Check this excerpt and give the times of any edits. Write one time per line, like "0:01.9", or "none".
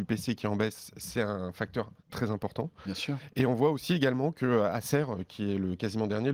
0:02.0